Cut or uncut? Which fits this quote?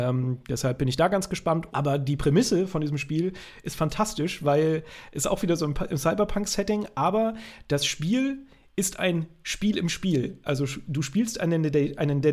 cut